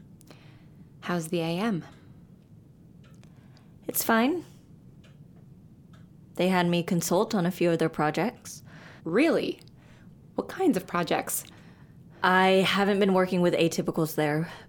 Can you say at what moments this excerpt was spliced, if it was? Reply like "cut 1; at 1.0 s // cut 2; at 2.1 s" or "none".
cut 1; at 9.0 s